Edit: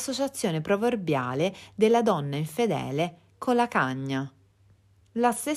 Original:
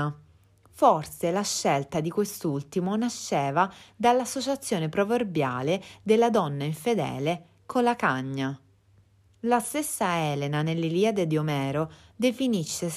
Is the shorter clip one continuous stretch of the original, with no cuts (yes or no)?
yes